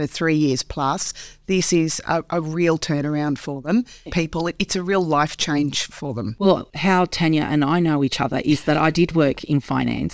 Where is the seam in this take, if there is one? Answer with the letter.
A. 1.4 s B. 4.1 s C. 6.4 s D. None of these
B